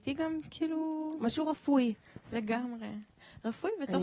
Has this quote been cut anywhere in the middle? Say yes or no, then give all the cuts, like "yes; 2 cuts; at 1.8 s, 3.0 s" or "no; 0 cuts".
no; 0 cuts